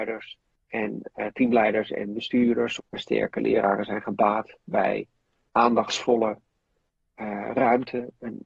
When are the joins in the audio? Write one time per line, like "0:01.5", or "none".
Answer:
0:02.8